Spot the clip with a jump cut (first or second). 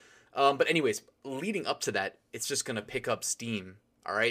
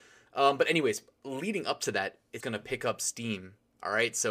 second